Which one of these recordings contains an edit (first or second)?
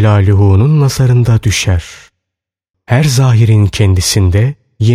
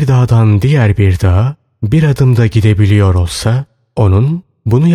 first